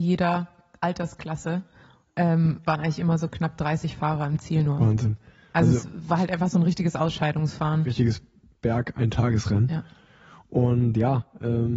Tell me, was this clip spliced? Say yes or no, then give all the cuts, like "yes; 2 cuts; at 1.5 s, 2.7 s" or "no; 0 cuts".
no; 0 cuts